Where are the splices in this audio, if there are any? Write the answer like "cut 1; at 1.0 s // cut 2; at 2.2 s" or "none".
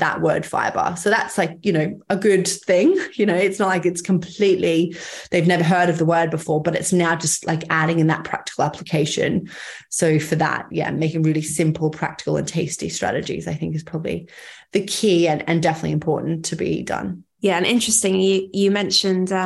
cut 1; at 17.3 s